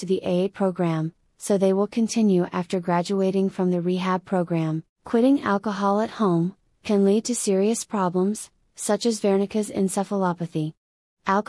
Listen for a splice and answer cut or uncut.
cut